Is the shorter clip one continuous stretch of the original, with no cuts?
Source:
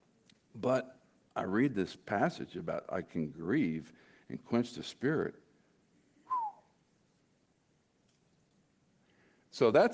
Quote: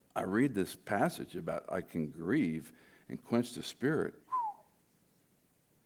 no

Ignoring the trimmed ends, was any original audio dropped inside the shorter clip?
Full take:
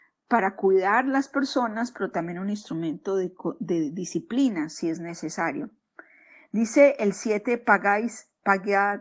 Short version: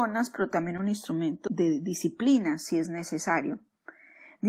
yes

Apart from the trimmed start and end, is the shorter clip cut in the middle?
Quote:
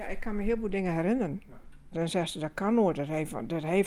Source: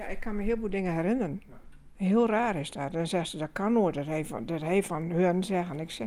yes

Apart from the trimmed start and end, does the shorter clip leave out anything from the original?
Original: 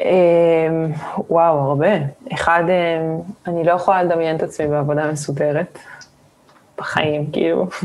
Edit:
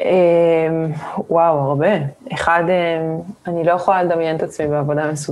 no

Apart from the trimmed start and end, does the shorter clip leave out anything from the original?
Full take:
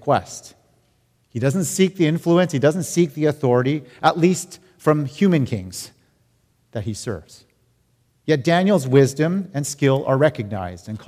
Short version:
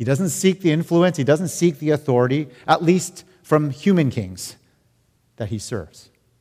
no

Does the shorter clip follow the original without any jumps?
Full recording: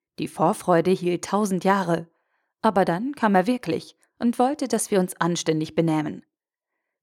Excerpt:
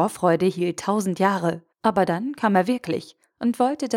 no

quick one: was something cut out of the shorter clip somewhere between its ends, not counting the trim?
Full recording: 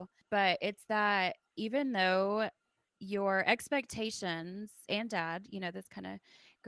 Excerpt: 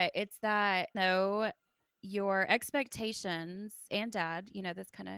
yes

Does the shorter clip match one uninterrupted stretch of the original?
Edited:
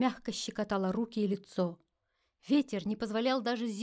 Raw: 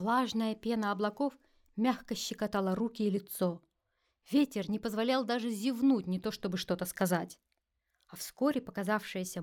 yes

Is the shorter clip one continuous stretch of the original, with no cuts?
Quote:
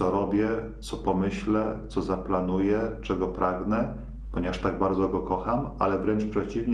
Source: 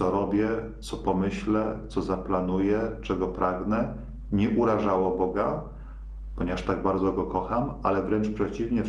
no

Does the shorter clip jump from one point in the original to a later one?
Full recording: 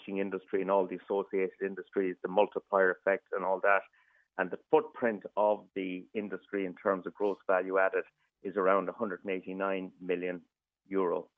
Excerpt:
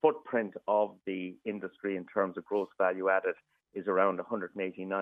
no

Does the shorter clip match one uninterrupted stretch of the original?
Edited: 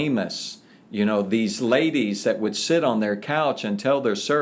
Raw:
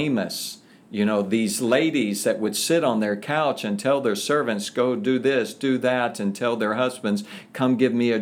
yes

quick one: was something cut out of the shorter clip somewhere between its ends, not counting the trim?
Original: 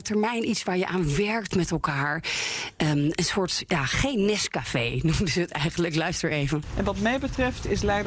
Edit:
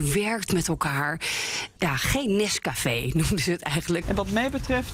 yes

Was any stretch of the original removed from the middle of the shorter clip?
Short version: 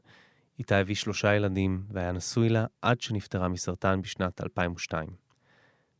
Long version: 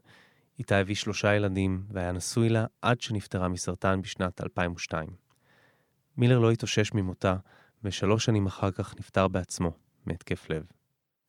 no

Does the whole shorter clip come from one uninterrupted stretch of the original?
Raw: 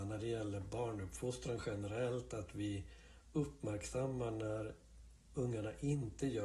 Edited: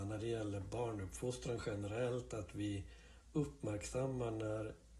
yes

